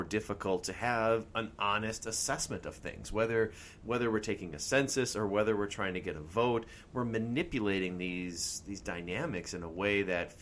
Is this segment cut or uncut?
uncut